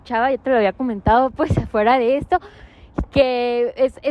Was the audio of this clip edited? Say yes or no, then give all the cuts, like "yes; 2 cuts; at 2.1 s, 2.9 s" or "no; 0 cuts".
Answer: no; 0 cuts